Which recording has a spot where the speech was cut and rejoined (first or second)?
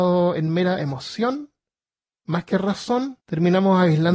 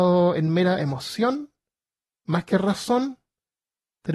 first